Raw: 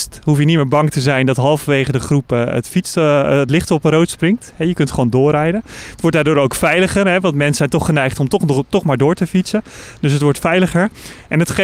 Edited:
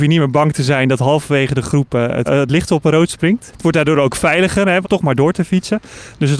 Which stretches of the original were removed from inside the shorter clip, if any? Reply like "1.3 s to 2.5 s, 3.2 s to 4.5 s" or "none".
2.6 s to 3.2 s, 4.5 s to 5.9 s, 7.2 s to 8.6 s